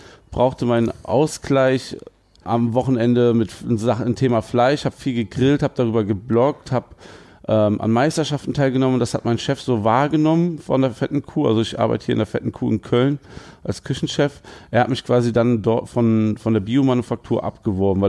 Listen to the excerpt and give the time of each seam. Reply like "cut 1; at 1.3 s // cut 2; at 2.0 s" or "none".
cut 1; at 2.4 s